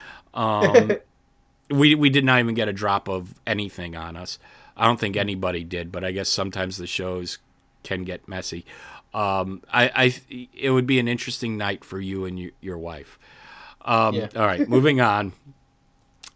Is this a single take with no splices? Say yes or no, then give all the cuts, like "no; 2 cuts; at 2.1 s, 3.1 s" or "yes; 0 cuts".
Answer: yes; 0 cuts